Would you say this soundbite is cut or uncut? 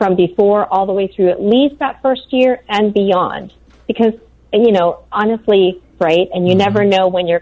cut